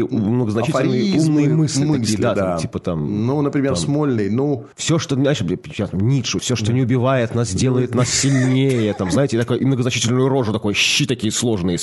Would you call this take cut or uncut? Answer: cut